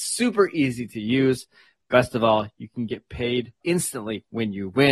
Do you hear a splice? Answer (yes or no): yes